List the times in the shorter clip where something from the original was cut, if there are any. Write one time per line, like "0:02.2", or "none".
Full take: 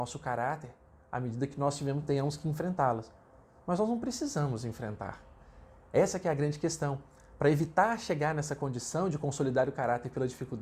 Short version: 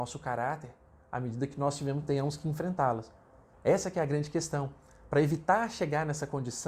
0:03.5